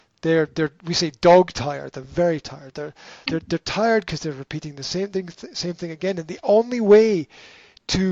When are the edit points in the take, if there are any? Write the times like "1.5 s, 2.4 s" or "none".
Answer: 3.2 s